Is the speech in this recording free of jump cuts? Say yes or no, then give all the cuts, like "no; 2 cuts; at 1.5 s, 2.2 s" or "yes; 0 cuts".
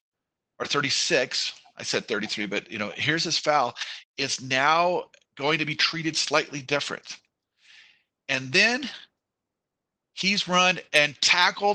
yes; 0 cuts